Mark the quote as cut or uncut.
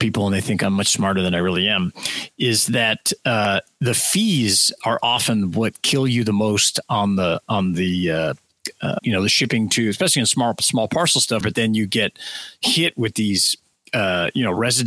cut